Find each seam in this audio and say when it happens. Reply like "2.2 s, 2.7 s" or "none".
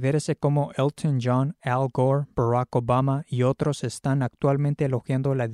none

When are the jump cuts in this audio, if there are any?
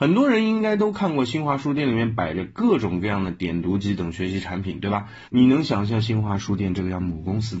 5.3 s

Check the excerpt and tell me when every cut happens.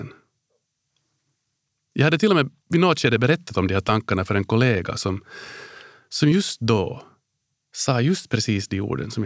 none

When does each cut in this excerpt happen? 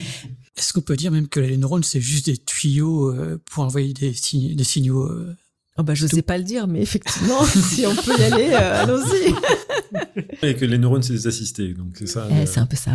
10.4 s

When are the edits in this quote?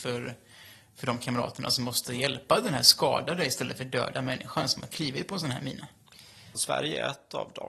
6.5 s

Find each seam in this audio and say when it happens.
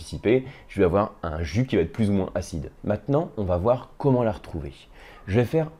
2.8 s

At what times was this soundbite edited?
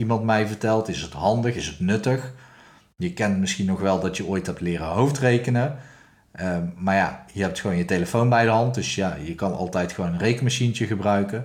none

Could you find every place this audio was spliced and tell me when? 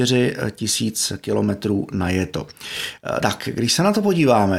3.2 s

